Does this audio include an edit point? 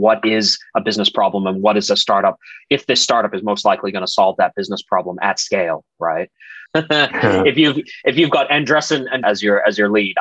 yes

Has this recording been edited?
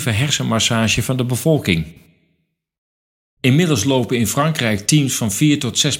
no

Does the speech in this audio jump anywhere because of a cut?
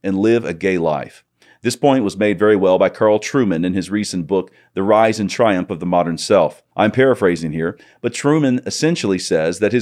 no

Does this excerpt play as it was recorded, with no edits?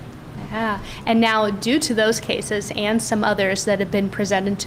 yes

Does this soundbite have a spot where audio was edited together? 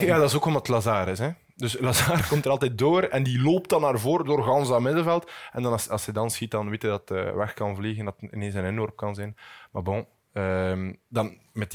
no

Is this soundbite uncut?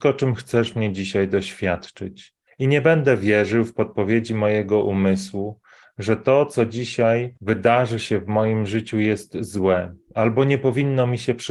no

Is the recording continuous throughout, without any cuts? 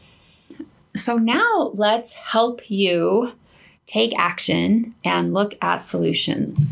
yes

